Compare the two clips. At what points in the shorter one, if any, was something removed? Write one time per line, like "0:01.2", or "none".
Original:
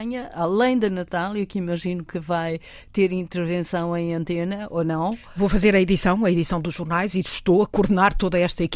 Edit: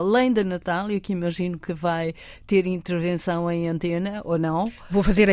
none